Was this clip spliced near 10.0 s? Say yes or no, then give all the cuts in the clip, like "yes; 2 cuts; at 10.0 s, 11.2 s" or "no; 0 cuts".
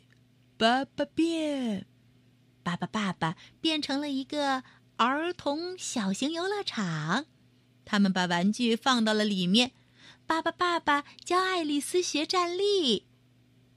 no; 0 cuts